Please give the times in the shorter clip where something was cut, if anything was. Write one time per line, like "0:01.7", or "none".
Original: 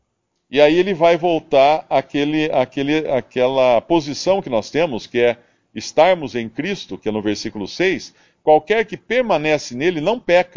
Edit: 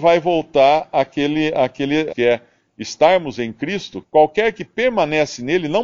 0:02.1
0:04.0